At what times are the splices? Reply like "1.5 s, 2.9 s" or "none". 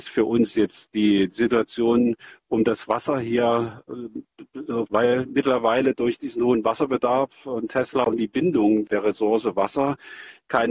4.9 s, 8.9 s